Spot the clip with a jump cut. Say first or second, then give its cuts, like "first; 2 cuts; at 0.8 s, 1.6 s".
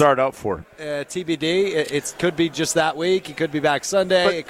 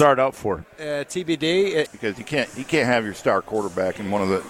second; 1 cut; at 1.9 s